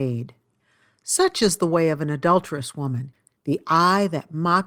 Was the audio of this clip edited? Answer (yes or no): yes